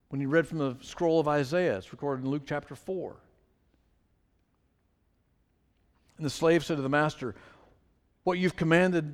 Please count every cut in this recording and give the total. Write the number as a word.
zero